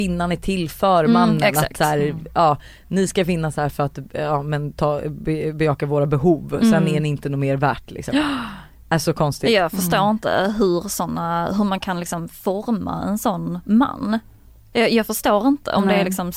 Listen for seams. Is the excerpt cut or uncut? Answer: uncut